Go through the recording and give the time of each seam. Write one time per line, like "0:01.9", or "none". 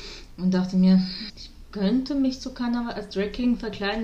0:01.3